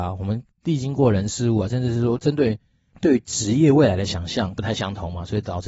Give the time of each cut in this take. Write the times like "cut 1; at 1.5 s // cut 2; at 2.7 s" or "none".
cut 1; at 2.2 s // cut 2; at 4.6 s